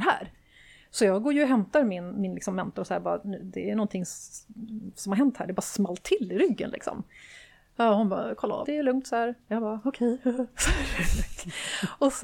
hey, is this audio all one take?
no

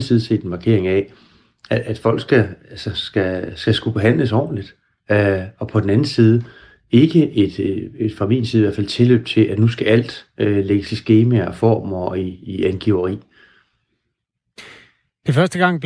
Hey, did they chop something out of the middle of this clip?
no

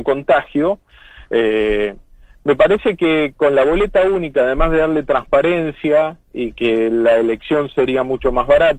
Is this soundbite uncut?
yes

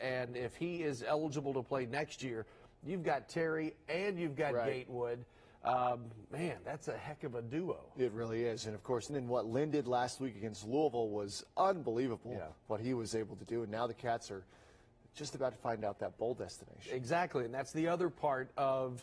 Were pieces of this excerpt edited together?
yes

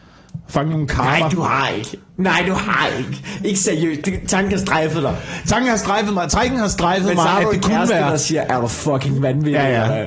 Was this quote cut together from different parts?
no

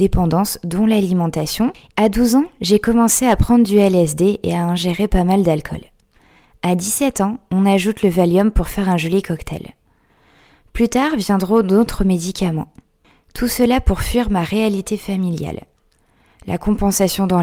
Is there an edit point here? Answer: yes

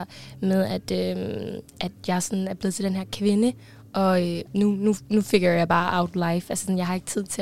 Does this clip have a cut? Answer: yes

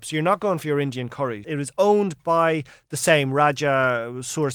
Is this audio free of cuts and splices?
no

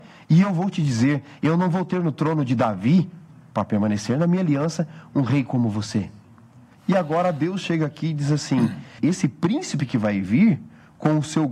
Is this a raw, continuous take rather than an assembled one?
no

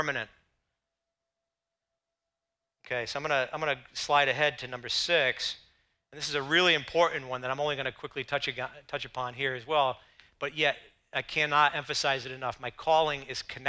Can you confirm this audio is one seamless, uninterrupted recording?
yes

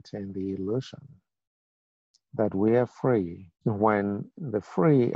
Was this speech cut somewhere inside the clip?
yes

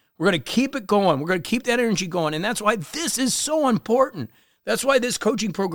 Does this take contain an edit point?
no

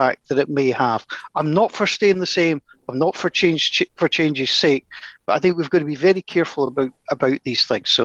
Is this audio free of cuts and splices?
yes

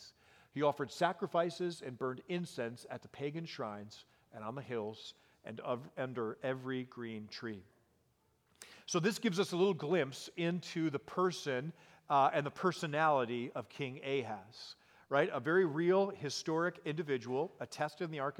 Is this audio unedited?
yes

